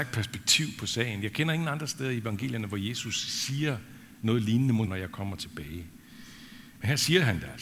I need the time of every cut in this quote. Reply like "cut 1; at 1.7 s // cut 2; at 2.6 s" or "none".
cut 1; at 4.9 s

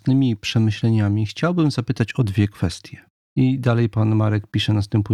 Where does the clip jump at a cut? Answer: cut 1; at 3.3 s

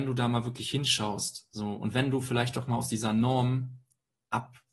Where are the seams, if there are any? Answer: none

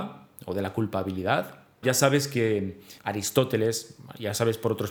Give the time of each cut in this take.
cut 1; at 1.8 s // cut 2; at 3.0 s

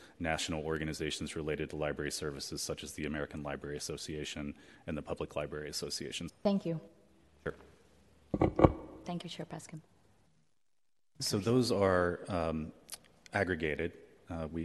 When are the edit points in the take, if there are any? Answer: cut 1; at 6.3 s // cut 2; at 11.2 s

